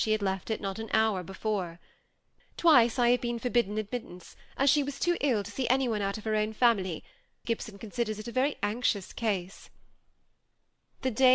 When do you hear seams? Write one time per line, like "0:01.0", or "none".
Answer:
0:02.4
0:07.4